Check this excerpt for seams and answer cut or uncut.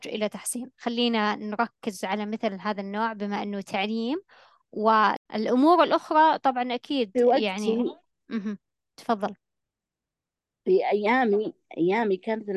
uncut